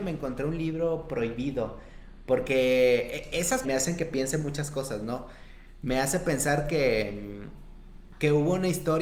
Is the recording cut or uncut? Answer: cut